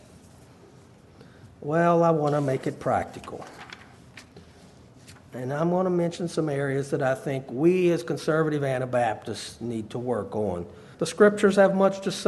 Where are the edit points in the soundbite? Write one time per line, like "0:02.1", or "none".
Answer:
0:10.9